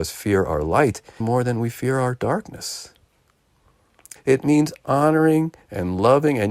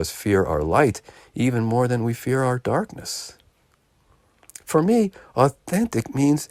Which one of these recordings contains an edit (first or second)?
first